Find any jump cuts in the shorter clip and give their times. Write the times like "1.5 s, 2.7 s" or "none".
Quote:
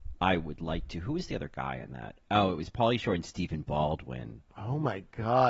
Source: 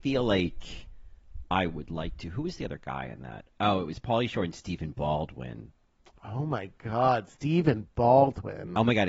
4.5 s